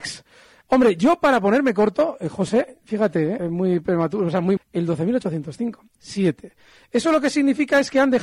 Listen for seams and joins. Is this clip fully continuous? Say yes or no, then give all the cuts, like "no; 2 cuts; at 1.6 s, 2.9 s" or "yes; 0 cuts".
no; 3 cuts; at 3.4 s, 4.6 s, 6.0 s